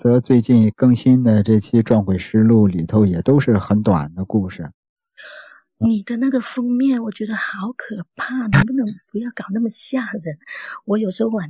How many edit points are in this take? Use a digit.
0